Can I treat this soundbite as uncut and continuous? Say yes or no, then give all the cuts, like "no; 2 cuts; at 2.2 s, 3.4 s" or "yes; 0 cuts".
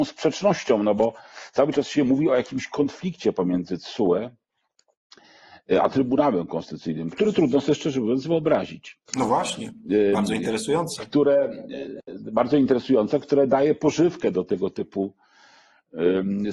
no; 2 cuts; at 7.1 s, 9.1 s